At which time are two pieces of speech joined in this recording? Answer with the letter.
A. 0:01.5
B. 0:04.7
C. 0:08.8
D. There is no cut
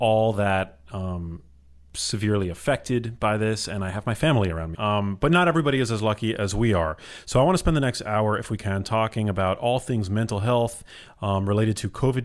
B